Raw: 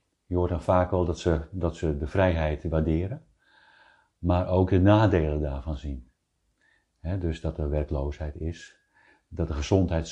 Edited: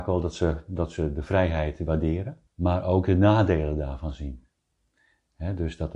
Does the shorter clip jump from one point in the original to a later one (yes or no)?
yes